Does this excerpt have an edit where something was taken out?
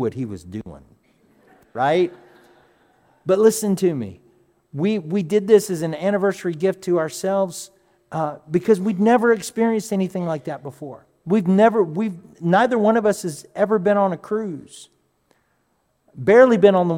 no; 0 cuts

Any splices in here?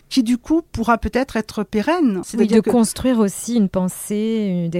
yes; 1 cut; at 2.2 s

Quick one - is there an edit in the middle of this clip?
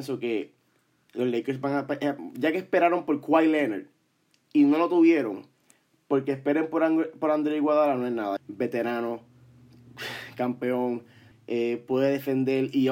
yes; 2 cuts; at 8.4 s, 11.3 s

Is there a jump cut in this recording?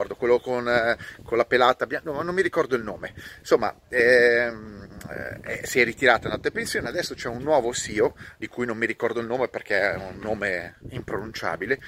no; 0 cuts

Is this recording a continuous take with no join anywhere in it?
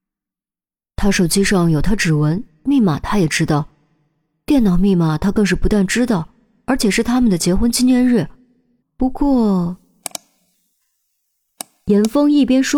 no; 1 cut; at 8.8 s

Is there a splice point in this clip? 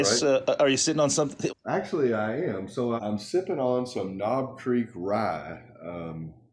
yes; 2 cuts; at 1.5 s, 3.0 s

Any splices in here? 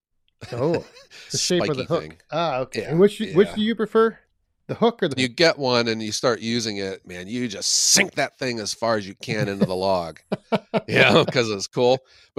yes; 3 cuts; at 1.3 s, 5.2 s, 7.0 s

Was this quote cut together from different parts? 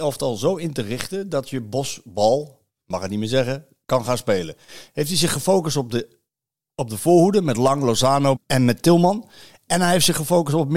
yes; 1 cut; at 8.4 s

